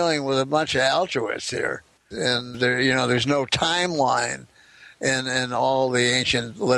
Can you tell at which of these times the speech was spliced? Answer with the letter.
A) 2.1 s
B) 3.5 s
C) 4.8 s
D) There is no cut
A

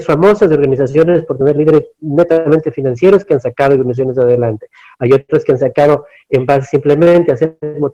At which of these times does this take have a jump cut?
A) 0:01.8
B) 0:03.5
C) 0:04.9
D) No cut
D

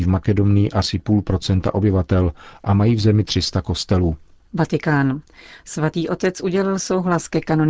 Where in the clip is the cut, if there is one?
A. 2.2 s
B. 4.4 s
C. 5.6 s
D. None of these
B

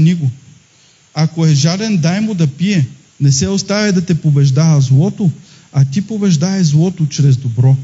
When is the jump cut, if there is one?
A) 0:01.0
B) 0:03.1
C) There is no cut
B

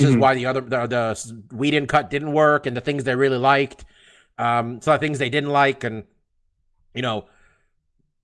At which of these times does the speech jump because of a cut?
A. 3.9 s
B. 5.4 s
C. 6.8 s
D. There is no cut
D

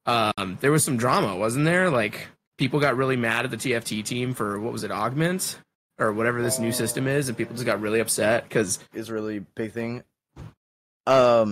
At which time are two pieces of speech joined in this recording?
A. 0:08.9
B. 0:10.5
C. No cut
A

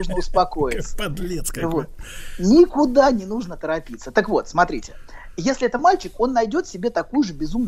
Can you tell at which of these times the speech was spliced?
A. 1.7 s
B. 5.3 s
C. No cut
C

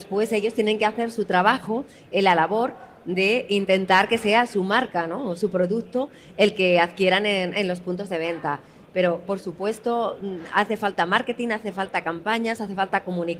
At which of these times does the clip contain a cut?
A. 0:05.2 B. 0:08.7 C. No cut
C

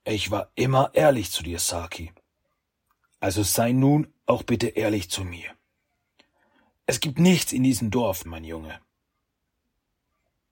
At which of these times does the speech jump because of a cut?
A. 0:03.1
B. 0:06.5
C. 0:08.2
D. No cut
C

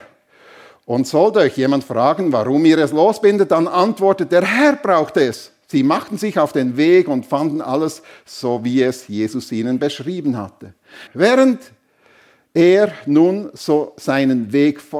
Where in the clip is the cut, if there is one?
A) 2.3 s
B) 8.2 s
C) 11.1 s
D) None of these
C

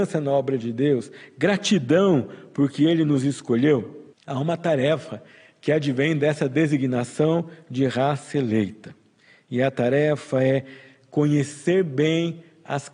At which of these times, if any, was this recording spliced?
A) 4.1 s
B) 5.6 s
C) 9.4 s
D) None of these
A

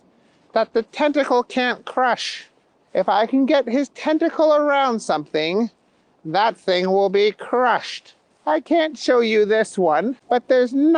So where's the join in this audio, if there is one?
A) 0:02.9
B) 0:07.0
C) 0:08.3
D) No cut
C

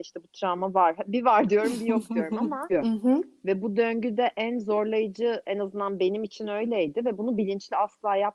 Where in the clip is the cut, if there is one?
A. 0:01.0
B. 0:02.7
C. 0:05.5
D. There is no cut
B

